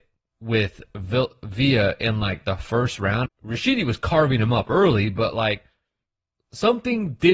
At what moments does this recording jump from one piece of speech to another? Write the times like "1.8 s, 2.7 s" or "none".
3.3 s